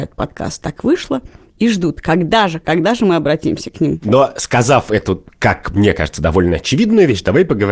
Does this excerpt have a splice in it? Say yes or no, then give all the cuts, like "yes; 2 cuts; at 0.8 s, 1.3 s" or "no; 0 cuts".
no; 0 cuts